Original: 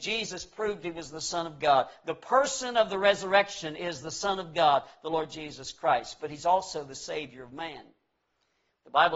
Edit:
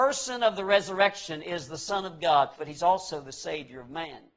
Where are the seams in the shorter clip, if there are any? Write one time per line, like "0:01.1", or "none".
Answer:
0:02.5